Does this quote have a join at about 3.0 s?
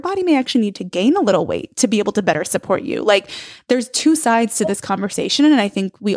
no; 0 cuts

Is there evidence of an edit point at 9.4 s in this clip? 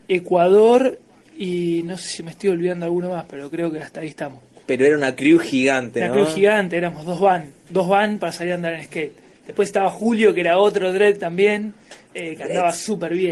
yes; 1 cut; at 9.4 s

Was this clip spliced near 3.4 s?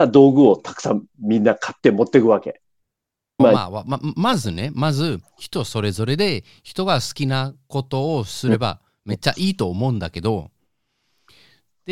yes; 1 cut; at 3.4 s

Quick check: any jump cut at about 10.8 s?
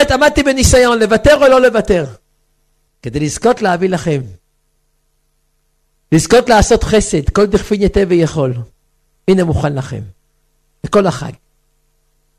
no; 2 cuts; at 2.9 s, 9.2 s

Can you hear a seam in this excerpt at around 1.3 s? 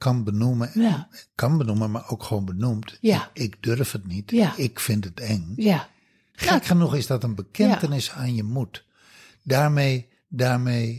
no; 1 cut; at 6.3 s

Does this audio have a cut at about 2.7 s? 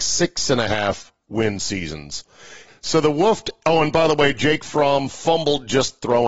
yes; 1 cut; at 2.7 s

